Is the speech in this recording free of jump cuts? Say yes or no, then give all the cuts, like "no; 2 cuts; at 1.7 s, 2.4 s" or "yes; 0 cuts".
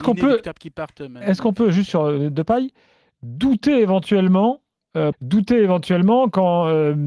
no; 1 cut; at 5.1 s